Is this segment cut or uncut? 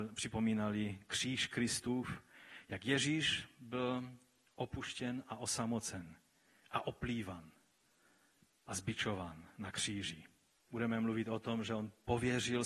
cut